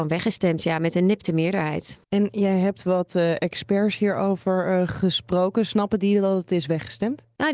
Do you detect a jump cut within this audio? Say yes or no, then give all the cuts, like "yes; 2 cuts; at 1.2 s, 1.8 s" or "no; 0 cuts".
yes; 1 cut; at 2.0 s